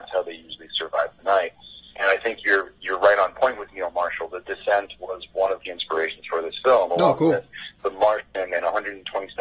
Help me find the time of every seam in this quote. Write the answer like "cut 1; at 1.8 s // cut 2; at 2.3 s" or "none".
none

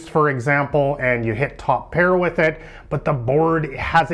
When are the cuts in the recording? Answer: none

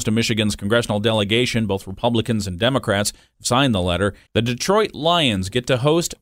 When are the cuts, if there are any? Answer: cut 1; at 4.3 s

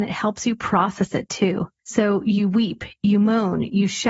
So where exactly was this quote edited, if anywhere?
none

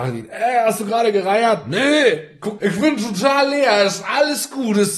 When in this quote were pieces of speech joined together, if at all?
cut 1; at 2.6 s

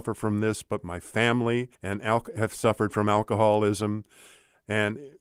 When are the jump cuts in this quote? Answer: cut 1; at 1.7 s

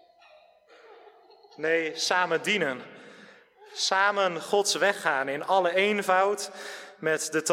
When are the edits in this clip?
none

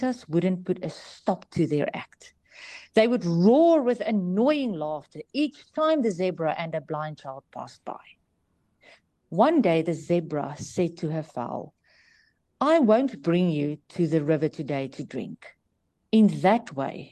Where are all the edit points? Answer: none

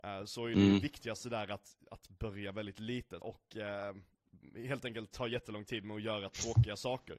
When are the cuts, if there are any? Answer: cut 1; at 3.2 s

